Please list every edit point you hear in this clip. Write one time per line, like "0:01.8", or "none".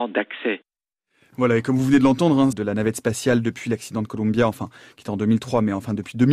0:02.5